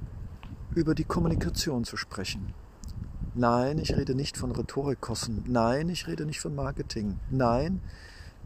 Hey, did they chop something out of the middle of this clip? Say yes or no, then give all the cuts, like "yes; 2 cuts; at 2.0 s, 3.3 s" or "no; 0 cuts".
no; 0 cuts